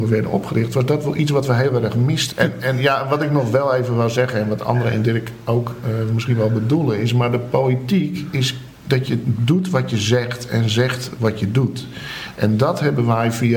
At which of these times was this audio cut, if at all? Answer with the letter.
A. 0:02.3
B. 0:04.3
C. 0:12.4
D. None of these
A